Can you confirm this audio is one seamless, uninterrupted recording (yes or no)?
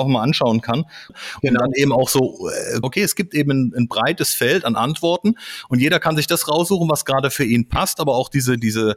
no